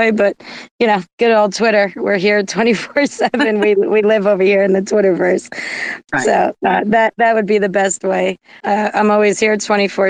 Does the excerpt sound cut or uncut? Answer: cut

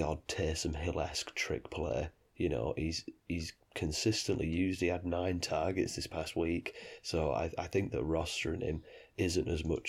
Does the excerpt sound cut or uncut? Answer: uncut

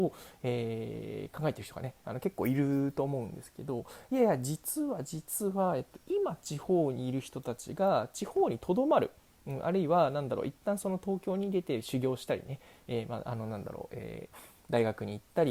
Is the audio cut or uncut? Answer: uncut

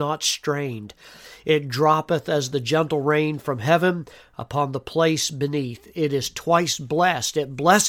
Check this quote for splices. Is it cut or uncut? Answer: uncut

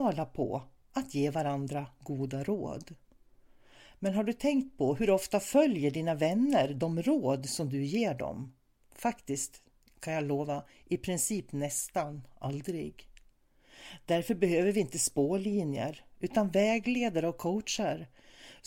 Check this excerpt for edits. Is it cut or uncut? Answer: uncut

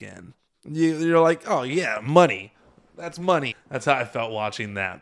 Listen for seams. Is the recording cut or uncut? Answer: cut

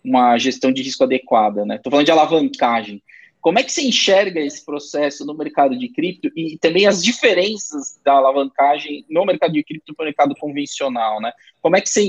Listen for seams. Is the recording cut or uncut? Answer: uncut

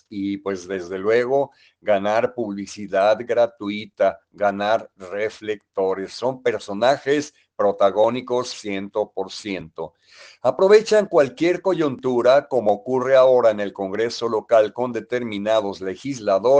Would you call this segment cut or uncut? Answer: uncut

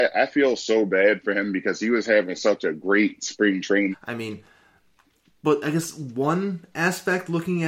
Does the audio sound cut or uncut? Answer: cut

